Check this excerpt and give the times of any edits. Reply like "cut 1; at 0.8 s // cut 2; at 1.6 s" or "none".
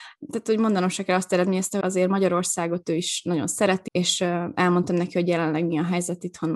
cut 1; at 1.8 s // cut 2; at 3.9 s

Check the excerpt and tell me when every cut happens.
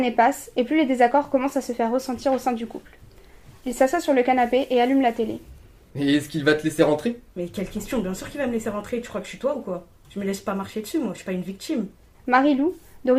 cut 1; at 3.6 s // cut 2; at 5.9 s // cut 3; at 12.1 s

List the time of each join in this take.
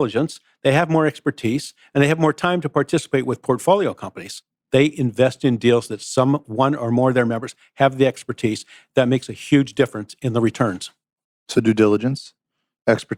cut 1; at 4.7 s

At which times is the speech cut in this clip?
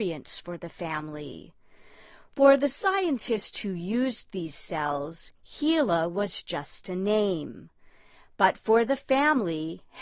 none

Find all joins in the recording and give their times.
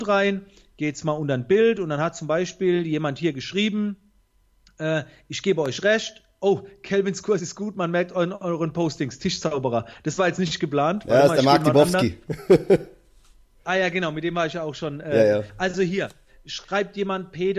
none

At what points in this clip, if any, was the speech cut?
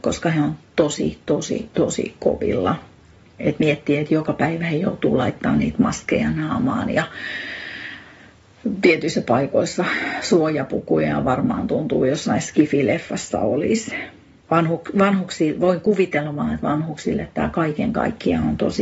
cut 1; at 14.4 s

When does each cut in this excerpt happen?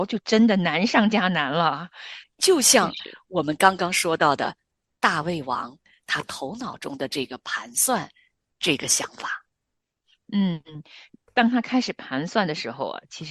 cut 1; at 2.2 s

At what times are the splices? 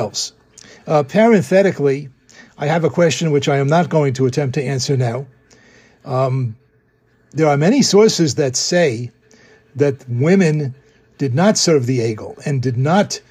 none

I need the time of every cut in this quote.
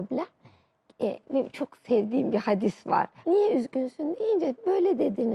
cut 1; at 3.2 s

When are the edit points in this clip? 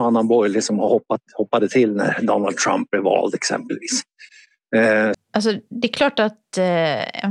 cut 1; at 5.1 s

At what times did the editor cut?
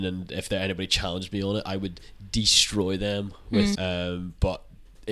cut 1; at 3.7 s

